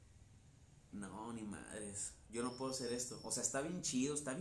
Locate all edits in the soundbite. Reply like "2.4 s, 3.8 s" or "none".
0.9 s